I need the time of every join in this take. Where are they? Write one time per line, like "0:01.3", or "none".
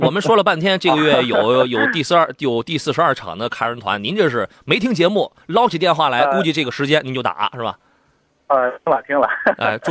none

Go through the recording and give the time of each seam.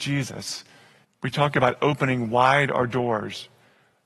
0:01.0

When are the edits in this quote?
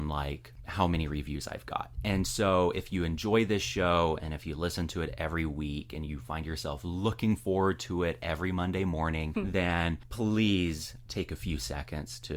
0:11.0

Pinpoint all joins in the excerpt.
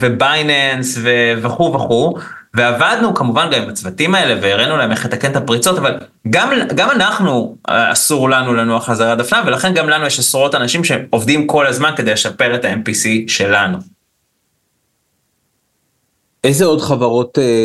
none

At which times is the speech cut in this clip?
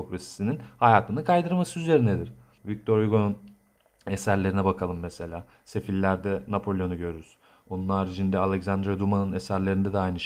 0:02.6

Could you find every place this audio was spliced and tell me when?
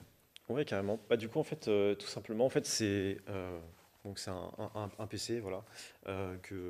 none

